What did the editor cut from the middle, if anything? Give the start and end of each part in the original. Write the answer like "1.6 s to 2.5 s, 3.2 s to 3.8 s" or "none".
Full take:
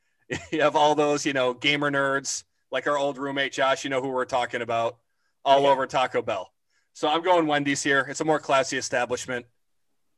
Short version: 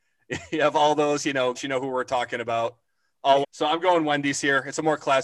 1.5 s to 3.8 s, 5.6 s to 6.8 s